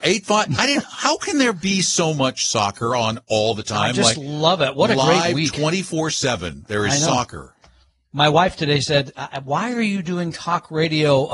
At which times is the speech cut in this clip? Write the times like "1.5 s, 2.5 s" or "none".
none